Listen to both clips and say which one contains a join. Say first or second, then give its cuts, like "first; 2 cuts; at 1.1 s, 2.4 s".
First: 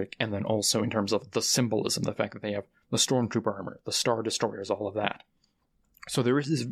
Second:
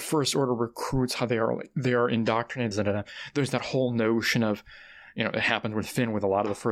second; 1 cut; at 2.7 s